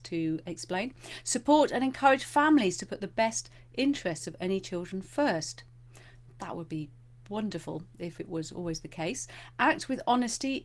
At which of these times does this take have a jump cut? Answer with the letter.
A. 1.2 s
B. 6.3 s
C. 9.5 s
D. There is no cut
D